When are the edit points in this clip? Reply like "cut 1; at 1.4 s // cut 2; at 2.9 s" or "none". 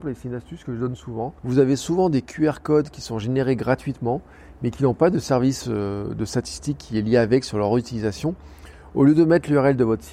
cut 1; at 1.4 s